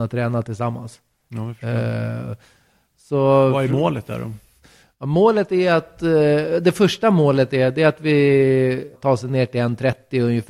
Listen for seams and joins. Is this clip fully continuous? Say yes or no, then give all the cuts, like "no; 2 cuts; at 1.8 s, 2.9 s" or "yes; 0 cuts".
no; 1 cut; at 8.9 s